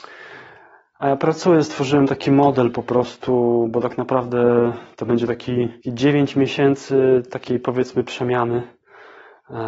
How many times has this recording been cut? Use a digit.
1